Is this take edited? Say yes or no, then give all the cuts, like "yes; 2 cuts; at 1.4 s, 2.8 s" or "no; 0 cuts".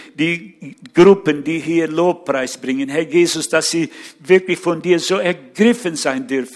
no; 0 cuts